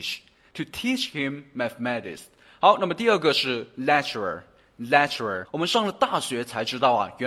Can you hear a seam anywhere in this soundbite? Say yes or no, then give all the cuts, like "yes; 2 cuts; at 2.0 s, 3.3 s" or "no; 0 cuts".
yes; 1 cut; at 5.5 s